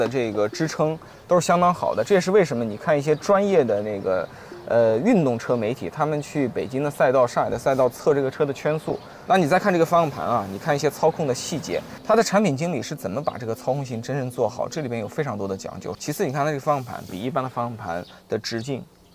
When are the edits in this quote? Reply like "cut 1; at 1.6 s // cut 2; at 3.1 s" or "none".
cut 1; at 9.3 s // cut 2; at 15.9 s